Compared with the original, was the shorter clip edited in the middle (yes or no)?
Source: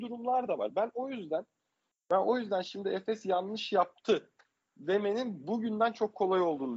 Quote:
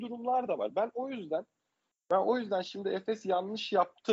no